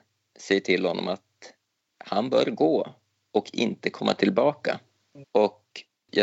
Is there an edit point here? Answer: yes; 1 cut; at 5.2 s

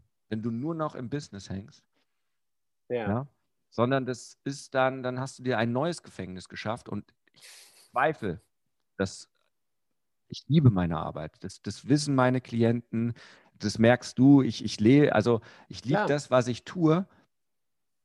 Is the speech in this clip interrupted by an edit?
no; 0 cuts

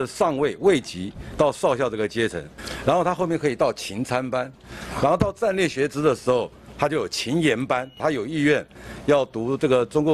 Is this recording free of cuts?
yes; 0 cuts

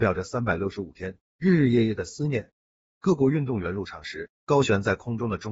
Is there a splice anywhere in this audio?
no; 0 cuts

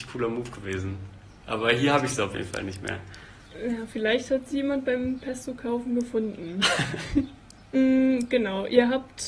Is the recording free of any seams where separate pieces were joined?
yes; 0 cuts

